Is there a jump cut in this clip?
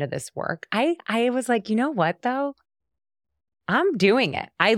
no; 0 cuts

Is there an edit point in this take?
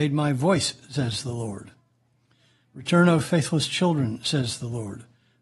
no; 0 cuts

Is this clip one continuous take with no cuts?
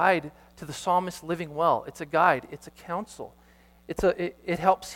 yes; 0 cuts

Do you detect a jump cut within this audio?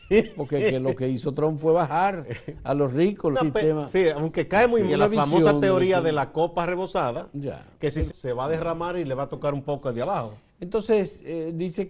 yes; 3 cuts; at 3.3 s, 4.9 s, 8.1 s

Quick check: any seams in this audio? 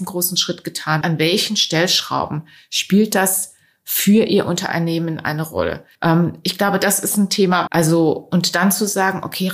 yes; 3 cuts; at 1.0 s, 5.9 s, 7.7 s

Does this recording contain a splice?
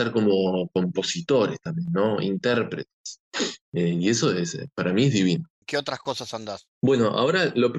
yes; 1 cut; at 5.6 s

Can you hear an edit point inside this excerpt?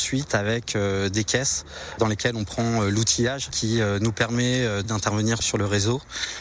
no; 0 cuts

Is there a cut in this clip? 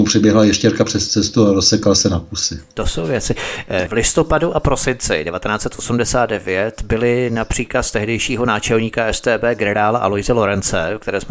yes; 1 cut; at 3.9 s

